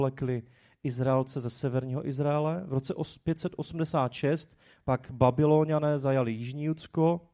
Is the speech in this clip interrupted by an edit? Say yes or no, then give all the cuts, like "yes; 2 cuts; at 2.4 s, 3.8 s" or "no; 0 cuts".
no; 0 cuts